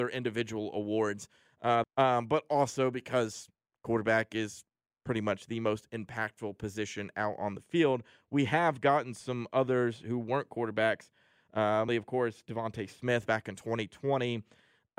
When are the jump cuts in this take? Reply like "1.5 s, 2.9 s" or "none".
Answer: 1.8 s, 11.9 s